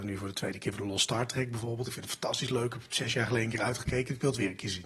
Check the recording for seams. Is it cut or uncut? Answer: uncut